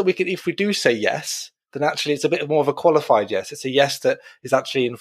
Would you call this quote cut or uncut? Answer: uncut